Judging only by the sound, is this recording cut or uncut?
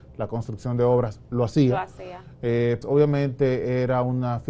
cut